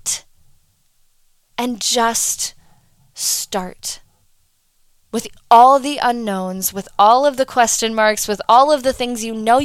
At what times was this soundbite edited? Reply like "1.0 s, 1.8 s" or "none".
none